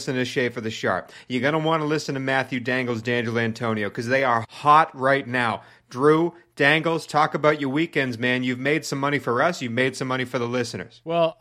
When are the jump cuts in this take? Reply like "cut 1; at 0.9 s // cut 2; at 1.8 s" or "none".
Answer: cut 1; at 4.4 s